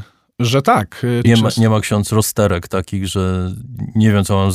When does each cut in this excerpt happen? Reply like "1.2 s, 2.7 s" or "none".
1.2 s